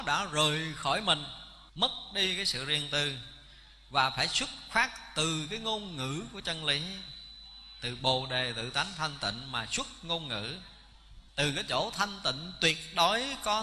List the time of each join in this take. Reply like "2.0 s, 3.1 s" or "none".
1.7 s, 11.3 s